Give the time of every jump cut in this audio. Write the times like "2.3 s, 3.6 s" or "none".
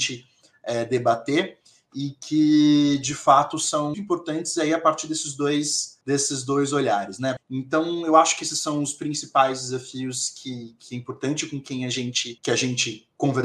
3.9 s, 6.0 s, 7.4 s